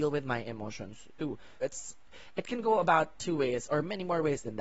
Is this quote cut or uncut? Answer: cut